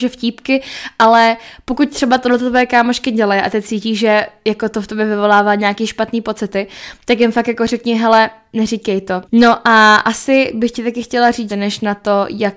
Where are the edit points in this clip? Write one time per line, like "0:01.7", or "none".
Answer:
0:09.2
0:11.5